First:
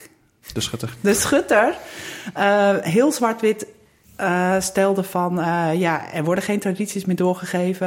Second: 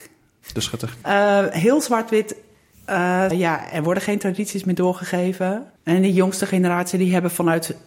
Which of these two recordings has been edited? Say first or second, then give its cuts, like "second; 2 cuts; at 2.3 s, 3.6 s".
second; 3 cuts; at 1.0 s, 3.3 s, 5.8 s